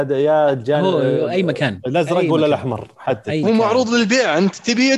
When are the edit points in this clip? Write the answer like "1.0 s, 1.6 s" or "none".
3.4 s

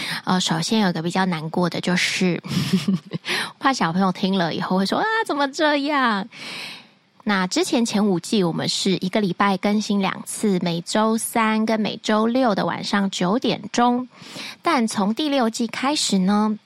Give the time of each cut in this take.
7.1 s

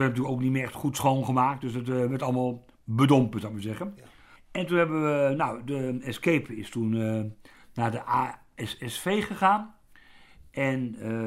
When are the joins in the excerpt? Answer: 4.4 s

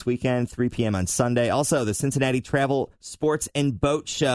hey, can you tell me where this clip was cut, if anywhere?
none

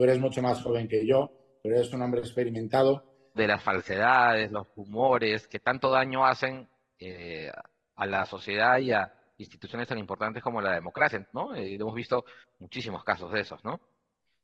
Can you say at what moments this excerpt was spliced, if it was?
3.3 s

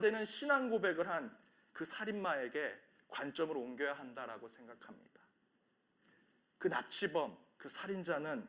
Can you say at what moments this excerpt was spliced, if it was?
none

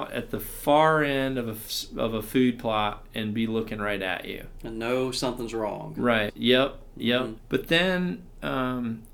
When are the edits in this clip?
6.3 s, 7.4 s

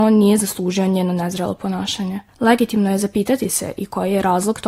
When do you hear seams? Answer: 2.3 s

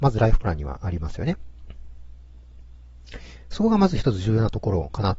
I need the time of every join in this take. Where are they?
none

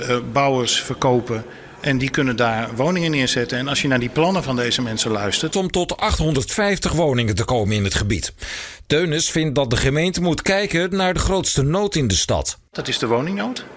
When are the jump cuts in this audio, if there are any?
5.5 s

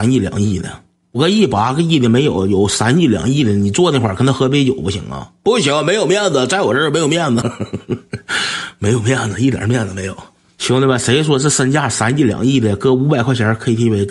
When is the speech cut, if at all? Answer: 7.4 s

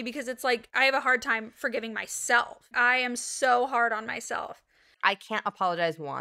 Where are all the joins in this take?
2.7 s, 4.9 s

